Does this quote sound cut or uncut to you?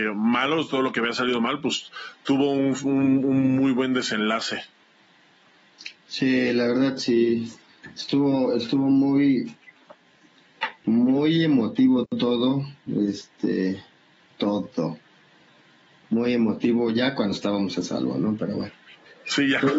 uncut